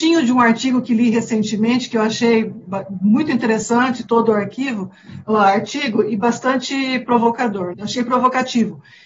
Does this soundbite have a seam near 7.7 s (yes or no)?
yes